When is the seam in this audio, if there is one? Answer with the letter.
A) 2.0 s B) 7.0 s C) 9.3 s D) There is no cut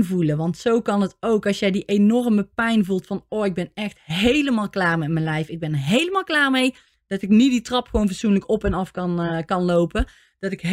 D